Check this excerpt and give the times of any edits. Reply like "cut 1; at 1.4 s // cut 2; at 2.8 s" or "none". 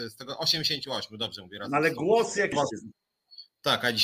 cut 1; at 2.5 s